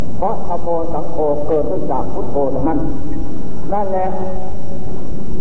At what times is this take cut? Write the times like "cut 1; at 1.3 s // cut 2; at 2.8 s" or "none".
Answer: none